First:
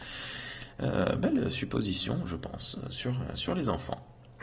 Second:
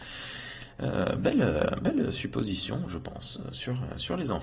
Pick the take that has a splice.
first; 1 cut; at 1.2 s

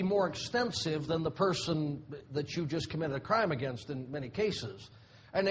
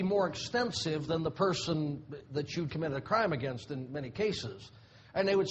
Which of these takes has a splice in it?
second; 1 cut; at 2.7 s

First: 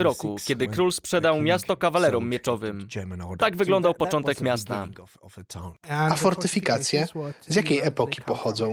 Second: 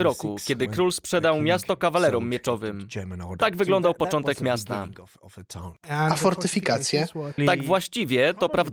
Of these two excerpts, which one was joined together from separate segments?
second; 1 cut; at 7.4 s

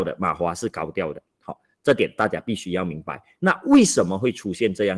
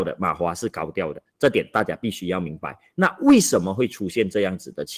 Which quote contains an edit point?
second; 1 cut; at 1.3 s

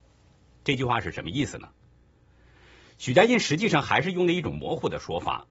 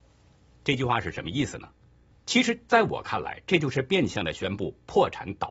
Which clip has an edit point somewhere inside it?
second; 1 cut; at 2.1 s

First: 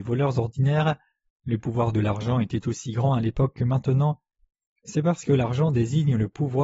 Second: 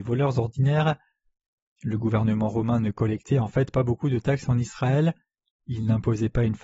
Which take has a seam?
first; 1 cut; at 1.3 s

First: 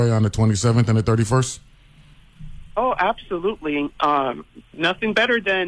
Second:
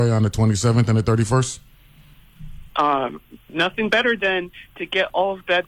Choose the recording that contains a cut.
second; 1 cut; at 2.7 s

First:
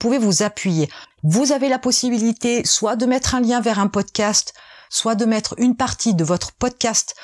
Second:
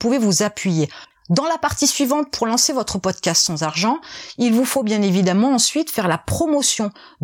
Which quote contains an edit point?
second; 1 cut; at 1.1 s

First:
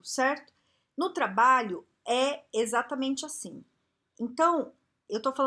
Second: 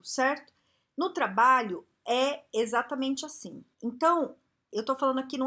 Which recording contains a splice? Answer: second; 1 cut; at 3.7 s

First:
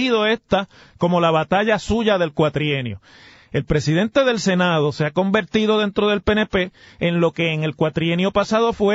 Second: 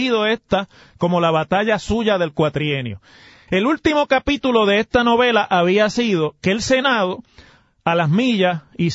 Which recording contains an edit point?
second; 1 cut; at 3.5 s

